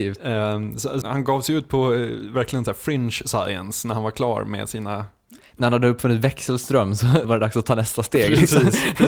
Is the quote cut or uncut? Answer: cut